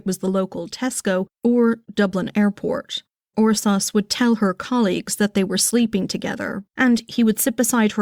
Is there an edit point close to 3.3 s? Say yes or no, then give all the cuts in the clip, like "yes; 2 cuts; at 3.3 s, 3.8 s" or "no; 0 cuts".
yes; 2 cuts; at 3.3 s, 6.7 s